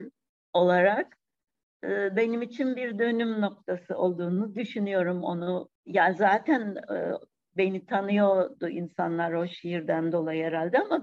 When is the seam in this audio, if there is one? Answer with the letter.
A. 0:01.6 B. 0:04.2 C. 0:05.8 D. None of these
C